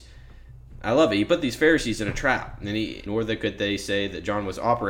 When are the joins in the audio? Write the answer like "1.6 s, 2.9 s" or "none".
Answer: 3.1 s